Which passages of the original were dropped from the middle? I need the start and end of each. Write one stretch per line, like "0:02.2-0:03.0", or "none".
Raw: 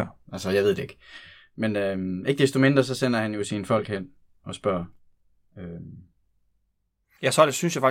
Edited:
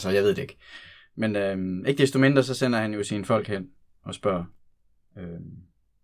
none